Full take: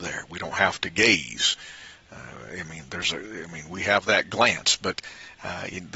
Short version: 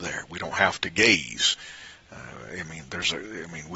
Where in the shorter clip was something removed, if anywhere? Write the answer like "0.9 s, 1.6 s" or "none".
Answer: none